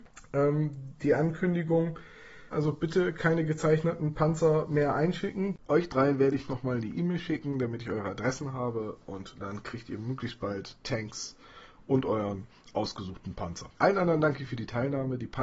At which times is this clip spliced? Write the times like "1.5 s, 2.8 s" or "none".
2.5 s, 5.7 s